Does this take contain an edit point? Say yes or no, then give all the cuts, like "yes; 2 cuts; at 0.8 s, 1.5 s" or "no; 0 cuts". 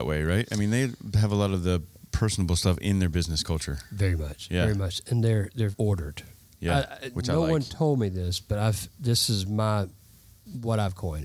yes; 1 cut; at 5.7 s